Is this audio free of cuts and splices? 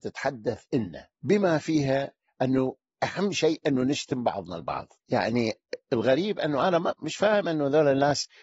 no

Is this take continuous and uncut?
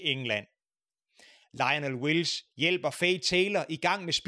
yes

